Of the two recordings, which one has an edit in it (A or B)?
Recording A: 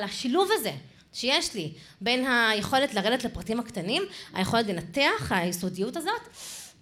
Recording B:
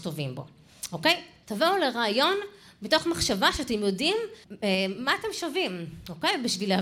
B